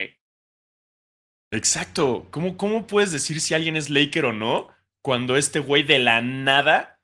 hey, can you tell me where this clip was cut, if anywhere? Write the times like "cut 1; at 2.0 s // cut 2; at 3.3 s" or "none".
none